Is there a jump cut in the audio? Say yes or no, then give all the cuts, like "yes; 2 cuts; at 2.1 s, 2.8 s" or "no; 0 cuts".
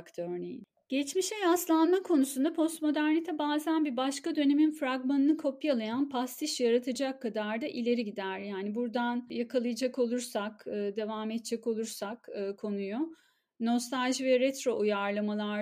no; 0 cuts